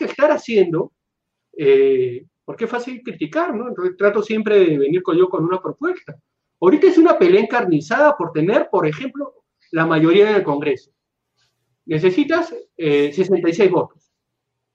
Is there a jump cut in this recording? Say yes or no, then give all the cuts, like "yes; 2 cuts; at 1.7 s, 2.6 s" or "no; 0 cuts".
no; 0 cuts